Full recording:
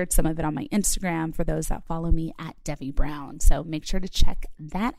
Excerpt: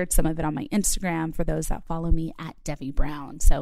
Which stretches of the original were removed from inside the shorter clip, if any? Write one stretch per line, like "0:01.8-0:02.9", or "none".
none